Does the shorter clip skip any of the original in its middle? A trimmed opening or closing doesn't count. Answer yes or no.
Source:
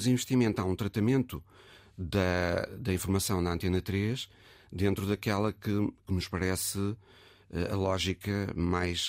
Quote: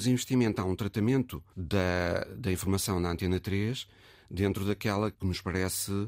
yes